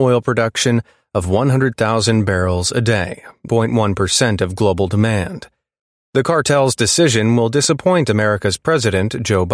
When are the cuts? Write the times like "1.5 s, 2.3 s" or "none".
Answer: 3.5 s